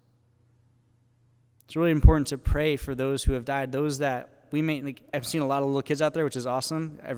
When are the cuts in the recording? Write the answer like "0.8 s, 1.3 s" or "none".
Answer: 1.6 s, 5.1 s